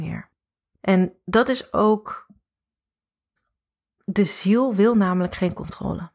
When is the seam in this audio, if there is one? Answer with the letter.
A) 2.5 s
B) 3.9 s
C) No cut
C